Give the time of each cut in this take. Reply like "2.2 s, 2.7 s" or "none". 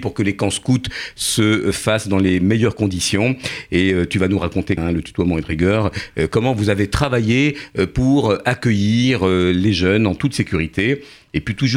4.8 s